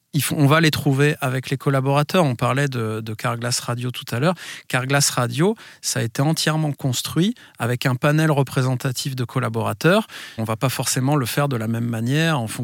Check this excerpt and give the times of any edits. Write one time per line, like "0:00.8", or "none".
0:10.4